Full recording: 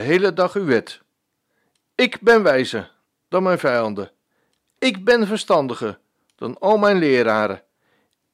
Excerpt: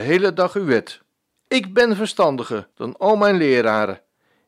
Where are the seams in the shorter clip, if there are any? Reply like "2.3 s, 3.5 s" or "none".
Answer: 1.3 s, 2.7 s